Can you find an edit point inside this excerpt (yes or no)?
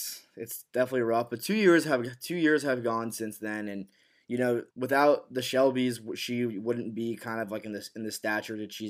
yes